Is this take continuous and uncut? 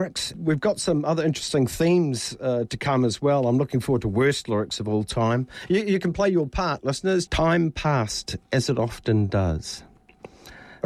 no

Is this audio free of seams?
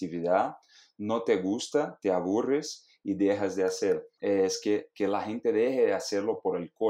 no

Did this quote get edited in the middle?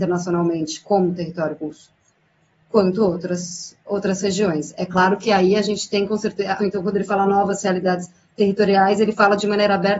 yes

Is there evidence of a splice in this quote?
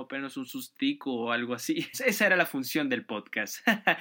yes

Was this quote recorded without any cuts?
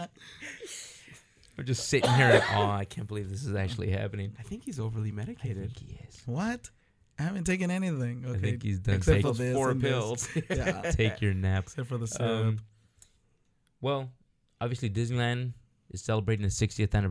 yes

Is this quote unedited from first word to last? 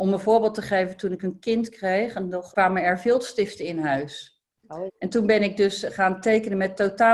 no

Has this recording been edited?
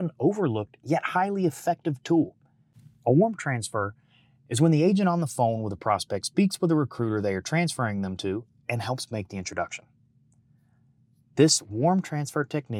no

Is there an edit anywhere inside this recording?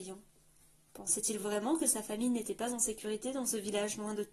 no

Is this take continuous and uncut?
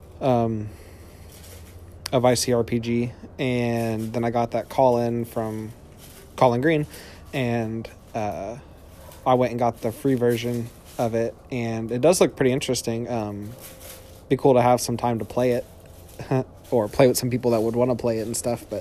yes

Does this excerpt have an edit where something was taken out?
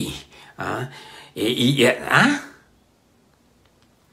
no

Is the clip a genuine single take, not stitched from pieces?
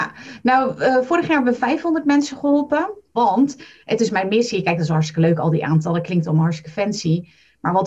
no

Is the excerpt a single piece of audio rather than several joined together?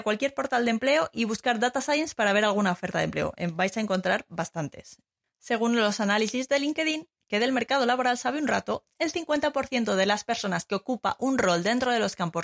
yes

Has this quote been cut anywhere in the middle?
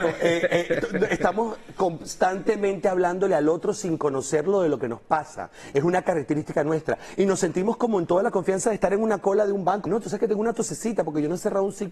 yes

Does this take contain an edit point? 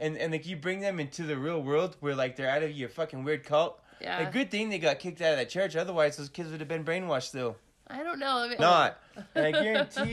yes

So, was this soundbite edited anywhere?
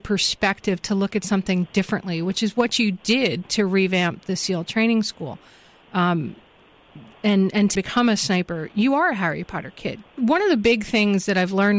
yes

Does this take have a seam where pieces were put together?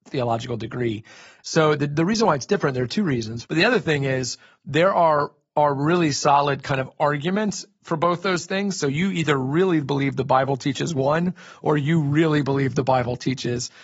yes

